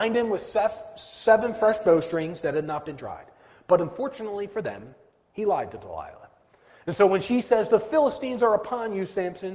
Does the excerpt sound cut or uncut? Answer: uncut